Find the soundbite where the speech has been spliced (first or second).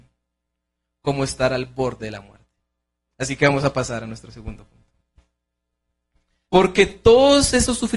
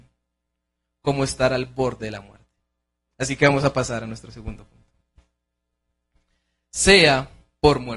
first